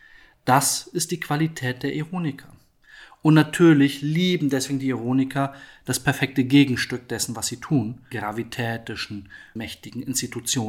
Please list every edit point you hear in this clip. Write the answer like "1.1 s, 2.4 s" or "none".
8.1 s, 9.6 s